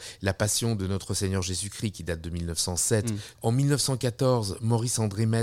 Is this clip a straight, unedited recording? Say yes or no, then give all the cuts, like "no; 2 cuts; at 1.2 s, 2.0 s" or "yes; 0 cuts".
no; 1 cut; at 3.3 s